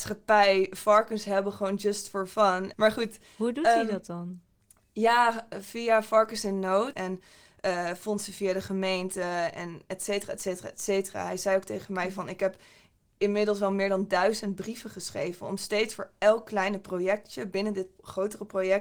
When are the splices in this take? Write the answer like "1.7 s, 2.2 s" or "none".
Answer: 2.7 s, 6.9 s